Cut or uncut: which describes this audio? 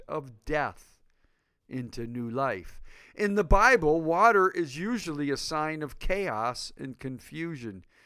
uncut